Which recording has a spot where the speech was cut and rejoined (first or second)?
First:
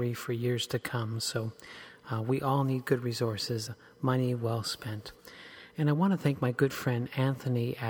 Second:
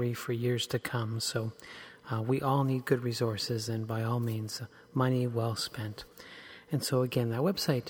first